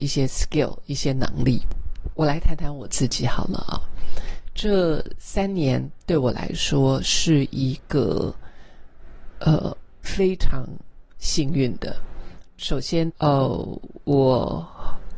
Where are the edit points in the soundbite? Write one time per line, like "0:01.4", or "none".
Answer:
0:02.1
0:10.0
0:13.1